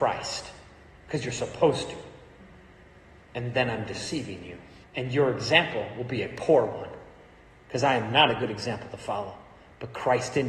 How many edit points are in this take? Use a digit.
1